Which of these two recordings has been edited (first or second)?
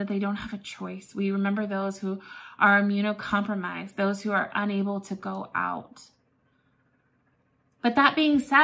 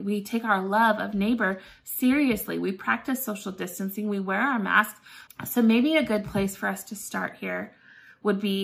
second